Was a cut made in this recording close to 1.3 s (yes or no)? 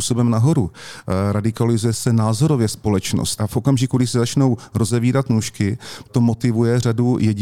no